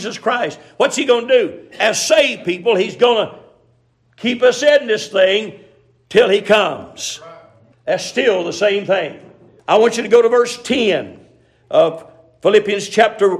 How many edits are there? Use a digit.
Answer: 2